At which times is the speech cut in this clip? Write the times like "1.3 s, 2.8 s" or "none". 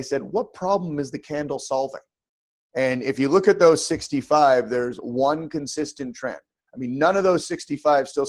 2.6 s